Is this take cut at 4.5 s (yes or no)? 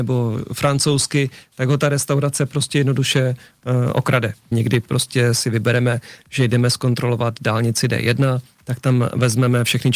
yes